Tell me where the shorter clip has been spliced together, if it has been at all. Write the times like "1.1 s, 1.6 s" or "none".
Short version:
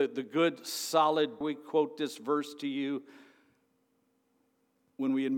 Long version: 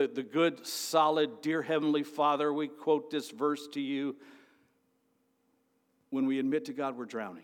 1.4 s